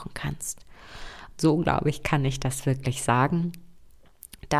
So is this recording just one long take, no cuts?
no; 1 cut; at 1.3 s

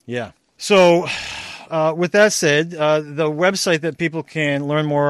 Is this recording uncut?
yes; 0 cuts

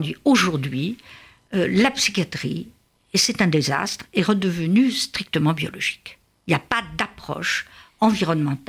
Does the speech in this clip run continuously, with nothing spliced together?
yes; 0 cuts

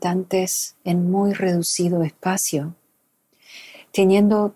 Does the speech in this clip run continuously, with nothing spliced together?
yes; 0 cuts

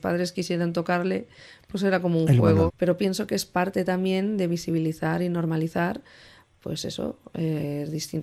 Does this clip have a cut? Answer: yes; 1 cut; at 2.7 s

